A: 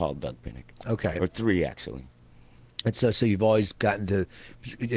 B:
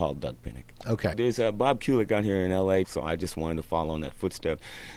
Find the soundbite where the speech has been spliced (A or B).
B